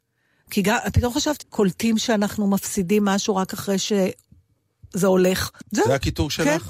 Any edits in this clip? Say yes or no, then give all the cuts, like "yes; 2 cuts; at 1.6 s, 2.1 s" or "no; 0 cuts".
yes; 2 cuts; at 1.4 s, 5.6 s